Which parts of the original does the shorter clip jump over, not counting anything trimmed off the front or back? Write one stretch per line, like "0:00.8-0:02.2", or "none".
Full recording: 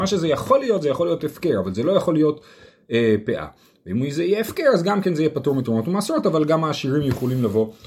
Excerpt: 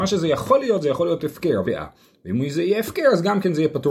0:01.6-0:03.2